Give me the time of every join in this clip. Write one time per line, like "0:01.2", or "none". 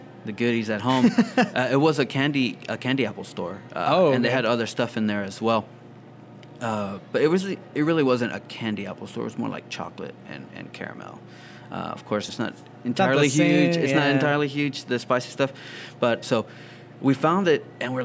0:12.3
0:16.2